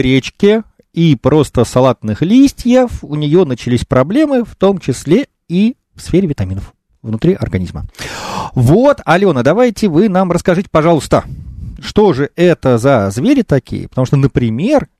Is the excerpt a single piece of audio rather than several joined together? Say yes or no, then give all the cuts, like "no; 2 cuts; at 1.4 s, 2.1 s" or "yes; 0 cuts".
yes; 0 cuts